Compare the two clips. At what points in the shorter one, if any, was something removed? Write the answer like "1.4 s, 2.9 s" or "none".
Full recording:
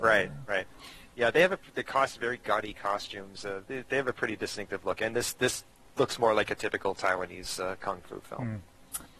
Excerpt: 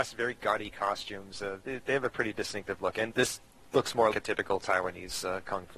3.1 s, 4.1 s